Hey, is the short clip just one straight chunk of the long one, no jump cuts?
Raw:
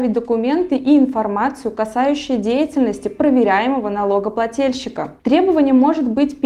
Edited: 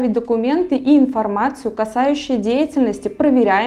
yes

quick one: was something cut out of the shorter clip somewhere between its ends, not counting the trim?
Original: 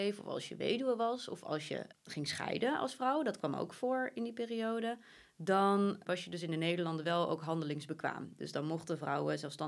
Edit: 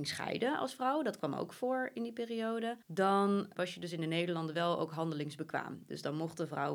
yes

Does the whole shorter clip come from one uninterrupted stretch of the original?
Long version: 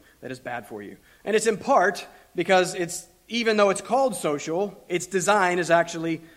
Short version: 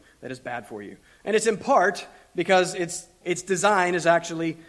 no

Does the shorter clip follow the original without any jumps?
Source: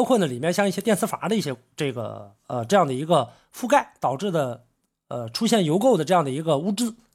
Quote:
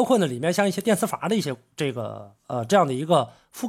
yes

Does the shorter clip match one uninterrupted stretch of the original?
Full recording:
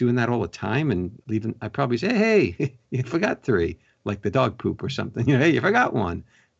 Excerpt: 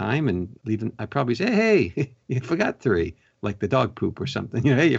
yes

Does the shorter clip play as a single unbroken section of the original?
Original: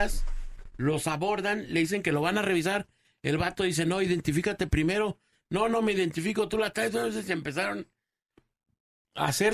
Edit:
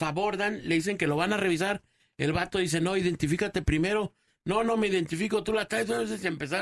yes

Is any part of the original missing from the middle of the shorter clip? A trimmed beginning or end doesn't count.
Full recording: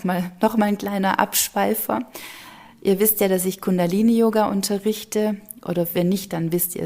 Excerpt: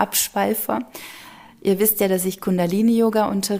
no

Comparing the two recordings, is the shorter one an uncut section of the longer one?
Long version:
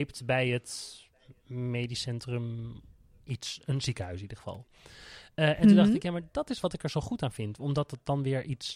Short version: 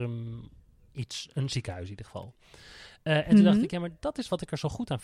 yes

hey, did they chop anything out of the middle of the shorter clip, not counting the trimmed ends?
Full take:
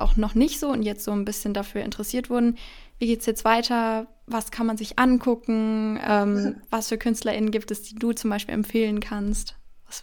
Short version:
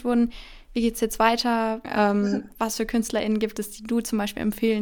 yes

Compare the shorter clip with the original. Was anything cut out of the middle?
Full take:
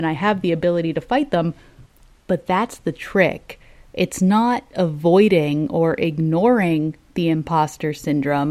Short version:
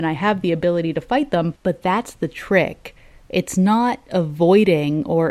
yes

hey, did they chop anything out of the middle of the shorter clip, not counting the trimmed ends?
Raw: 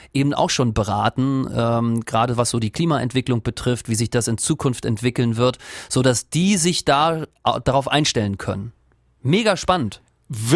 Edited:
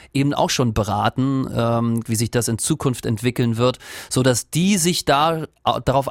yes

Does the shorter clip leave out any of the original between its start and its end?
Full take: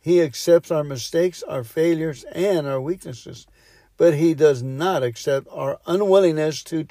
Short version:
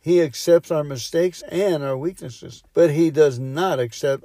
yes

